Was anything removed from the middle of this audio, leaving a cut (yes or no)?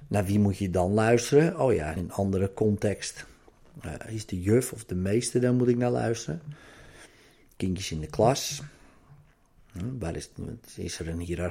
yes